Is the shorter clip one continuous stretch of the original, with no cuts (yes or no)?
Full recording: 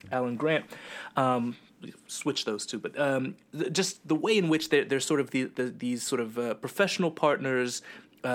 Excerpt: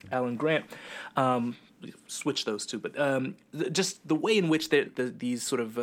no